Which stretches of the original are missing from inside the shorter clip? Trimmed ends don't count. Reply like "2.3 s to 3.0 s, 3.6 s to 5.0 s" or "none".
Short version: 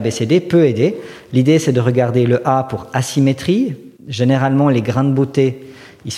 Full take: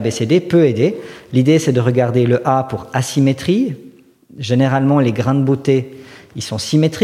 4.0 s to 4.3 s